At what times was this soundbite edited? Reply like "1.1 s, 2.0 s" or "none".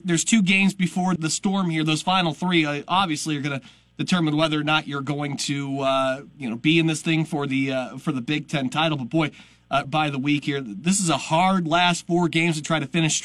1.2 s, 9.8 s